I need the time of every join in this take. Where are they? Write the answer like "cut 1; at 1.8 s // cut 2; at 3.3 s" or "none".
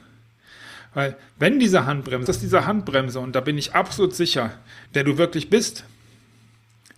cut 1; at 2.3 s // cut 2; at 4.9 s